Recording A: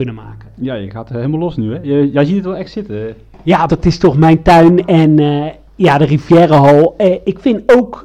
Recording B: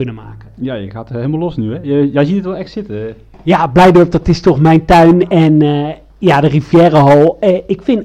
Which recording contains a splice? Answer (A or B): A